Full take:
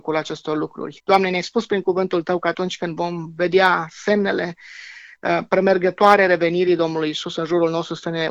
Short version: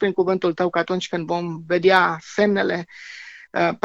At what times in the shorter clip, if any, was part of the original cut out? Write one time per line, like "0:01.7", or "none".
none